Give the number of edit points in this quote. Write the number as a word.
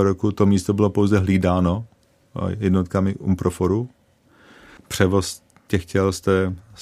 one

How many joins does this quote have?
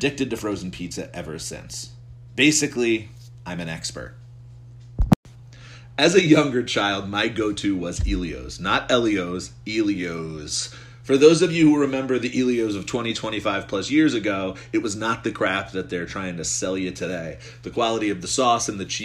zero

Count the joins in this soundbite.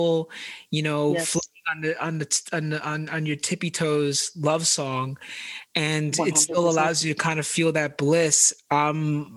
zero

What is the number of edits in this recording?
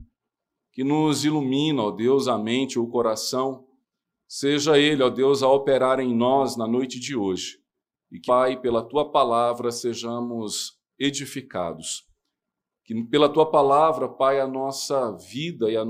one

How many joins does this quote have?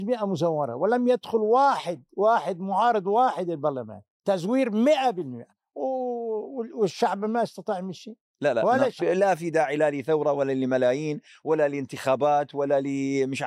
one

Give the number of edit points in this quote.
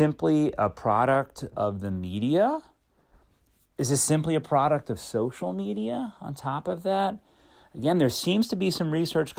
zero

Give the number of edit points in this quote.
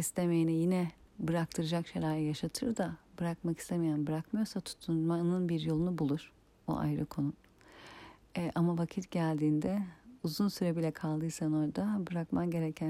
zero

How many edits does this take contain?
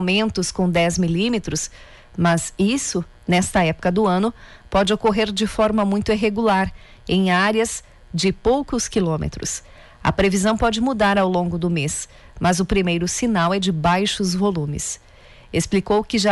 zero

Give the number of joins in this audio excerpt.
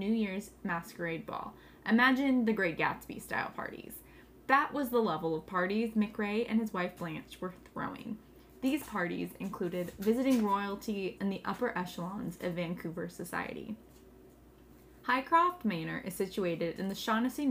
one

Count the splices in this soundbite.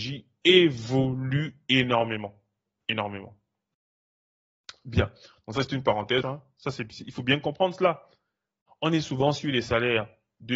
two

